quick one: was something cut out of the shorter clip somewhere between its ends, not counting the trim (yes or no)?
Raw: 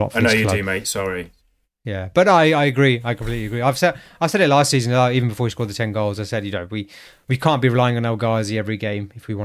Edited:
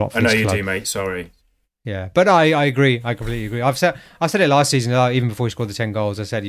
no